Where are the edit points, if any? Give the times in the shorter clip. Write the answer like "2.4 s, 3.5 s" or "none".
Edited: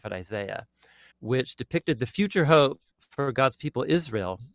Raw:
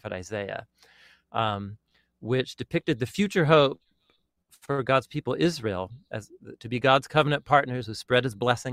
1.1 s, 2.9 s